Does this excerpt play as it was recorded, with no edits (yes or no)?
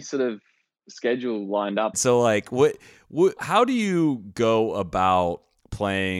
no